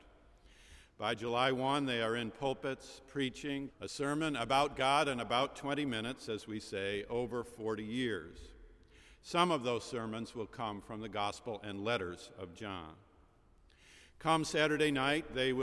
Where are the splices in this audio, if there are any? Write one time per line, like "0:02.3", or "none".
0:03.7